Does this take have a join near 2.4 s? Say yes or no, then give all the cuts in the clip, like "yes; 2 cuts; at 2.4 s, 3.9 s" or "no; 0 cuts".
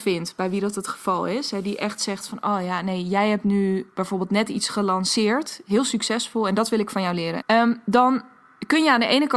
no; 1 cut; at 7.4 s